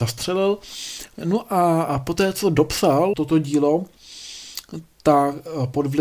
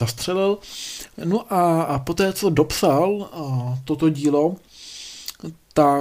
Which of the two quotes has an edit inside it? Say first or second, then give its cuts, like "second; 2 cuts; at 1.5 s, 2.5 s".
first; 1 cut; at 3.1 s